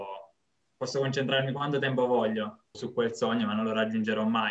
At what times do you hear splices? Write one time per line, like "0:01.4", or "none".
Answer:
0:02.7